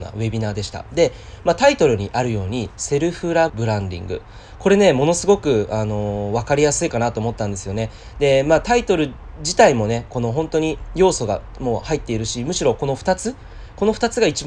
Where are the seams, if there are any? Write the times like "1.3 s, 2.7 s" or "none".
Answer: 3.5 s